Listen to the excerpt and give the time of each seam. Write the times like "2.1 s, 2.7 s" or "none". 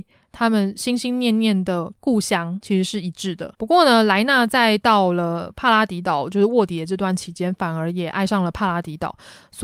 none